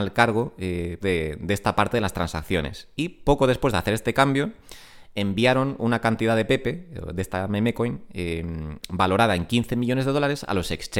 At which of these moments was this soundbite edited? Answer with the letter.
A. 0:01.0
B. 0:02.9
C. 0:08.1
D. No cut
A